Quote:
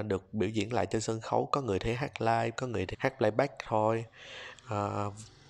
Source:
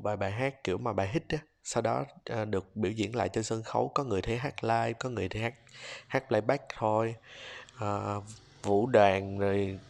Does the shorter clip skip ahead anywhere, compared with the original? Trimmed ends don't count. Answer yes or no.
yes